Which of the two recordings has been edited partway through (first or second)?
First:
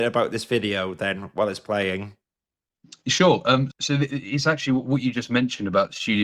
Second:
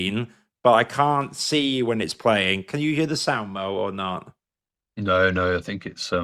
first